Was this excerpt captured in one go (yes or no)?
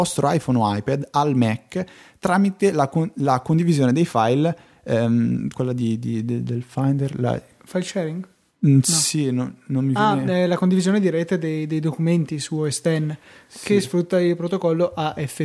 no